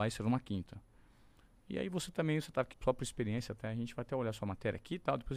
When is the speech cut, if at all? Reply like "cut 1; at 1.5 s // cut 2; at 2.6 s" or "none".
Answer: cut 1; at 2.7 s

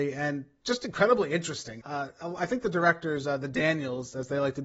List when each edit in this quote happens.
cut 1; at 1.8 s

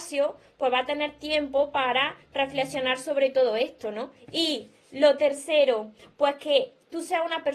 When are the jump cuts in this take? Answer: cut 1; at 4.2 s

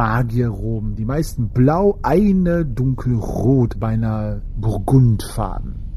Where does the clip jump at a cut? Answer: cut 1; at 3.8 s

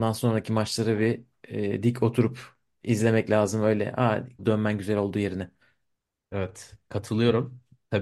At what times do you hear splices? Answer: cut 1; at 4.4 s

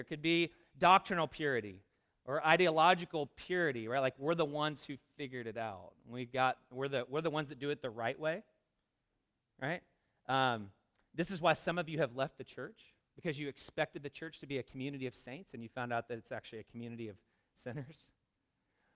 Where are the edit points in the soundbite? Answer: none

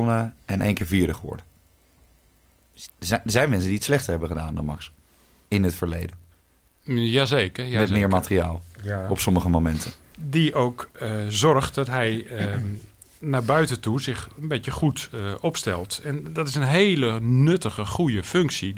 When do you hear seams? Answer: cut 1; at 2.9 s // cut 2; at 10.1 s

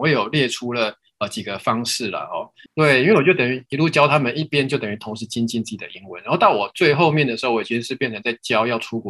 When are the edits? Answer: cut 1; at 2.7 s

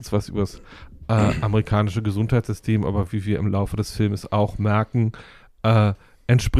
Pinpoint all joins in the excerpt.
none

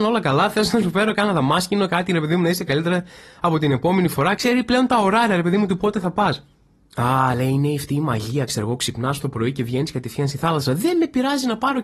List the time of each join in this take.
none

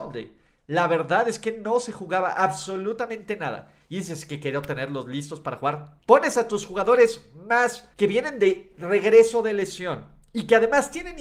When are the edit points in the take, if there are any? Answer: cut 1; at 6.0 s // cut 2; at 7.9 s

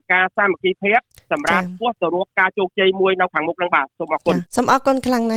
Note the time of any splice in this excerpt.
cut 1; at 4.5 s

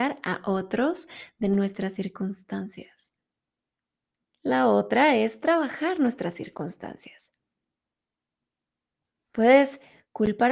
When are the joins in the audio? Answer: none

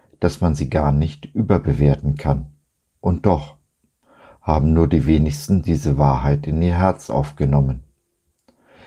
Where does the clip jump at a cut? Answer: none

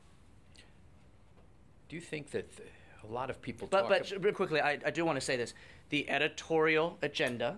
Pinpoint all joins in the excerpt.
cut 1; at 1.9 s // cut 2; at 4.3 s

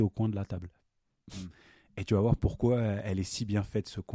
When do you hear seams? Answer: none

